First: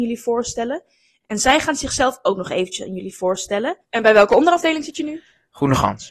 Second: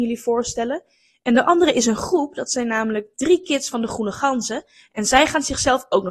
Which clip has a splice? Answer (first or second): first